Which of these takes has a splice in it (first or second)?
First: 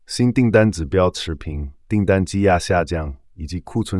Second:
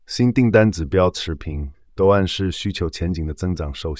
second